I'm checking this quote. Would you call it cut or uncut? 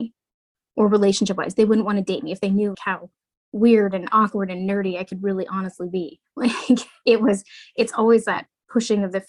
cut